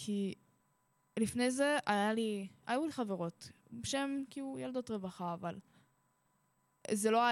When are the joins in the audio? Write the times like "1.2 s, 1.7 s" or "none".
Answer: none